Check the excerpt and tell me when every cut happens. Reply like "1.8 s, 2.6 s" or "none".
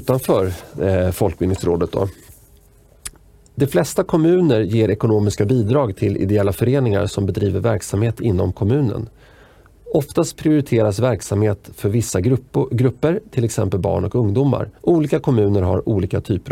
14.8 s